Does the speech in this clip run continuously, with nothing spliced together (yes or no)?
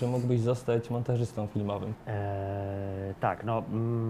no